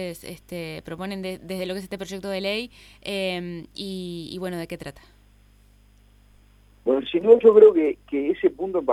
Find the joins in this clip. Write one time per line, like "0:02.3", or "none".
none